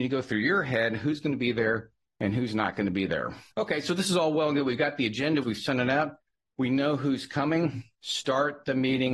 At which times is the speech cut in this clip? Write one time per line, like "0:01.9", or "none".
0:03.5
0:05.4
0:07.9